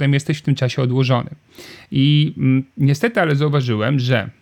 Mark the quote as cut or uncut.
uncut